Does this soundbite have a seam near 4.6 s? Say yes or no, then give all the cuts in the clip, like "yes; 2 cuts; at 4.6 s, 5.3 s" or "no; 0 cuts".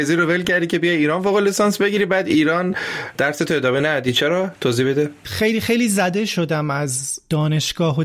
no; 0 cuts